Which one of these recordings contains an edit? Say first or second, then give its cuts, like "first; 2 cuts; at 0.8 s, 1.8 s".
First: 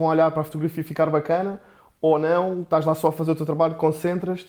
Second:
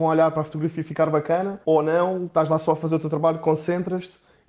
second; 1 cut; at 1.6 s